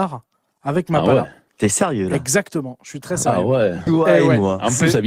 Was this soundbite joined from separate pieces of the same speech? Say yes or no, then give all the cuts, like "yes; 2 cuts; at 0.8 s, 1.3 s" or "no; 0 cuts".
yes; 2 cuts; at 1.5 s, 3.9 s